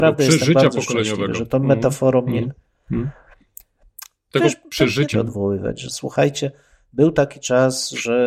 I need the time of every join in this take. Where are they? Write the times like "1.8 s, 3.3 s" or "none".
5.1 s